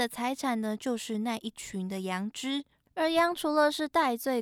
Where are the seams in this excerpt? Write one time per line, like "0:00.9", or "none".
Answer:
0:02.8